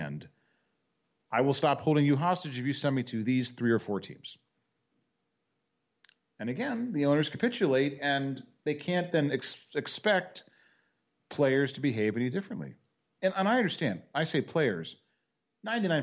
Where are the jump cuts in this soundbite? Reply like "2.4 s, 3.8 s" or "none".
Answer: none